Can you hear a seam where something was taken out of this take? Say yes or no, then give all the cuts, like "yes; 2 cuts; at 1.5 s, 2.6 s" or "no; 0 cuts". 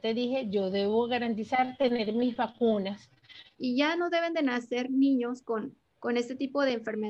yes; 1 cut; at 3.6 s